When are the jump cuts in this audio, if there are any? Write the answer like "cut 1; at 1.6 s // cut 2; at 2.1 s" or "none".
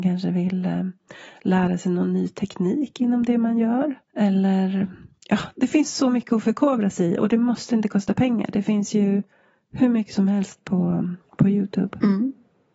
cut 1; at 4.0 s // cut 2; at 11.3 s